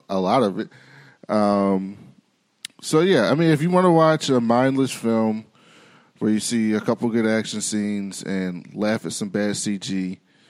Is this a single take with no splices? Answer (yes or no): yes